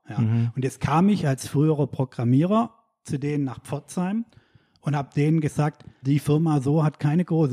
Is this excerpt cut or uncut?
cut